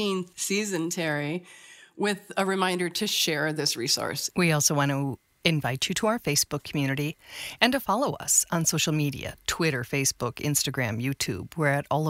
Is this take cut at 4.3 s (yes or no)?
yes